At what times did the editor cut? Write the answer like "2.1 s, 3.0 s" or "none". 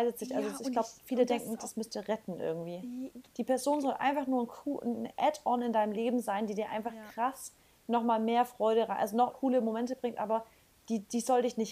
3.3 s, 9.3 s